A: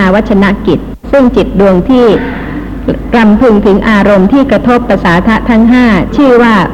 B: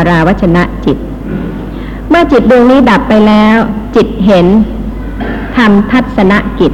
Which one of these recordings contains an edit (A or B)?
A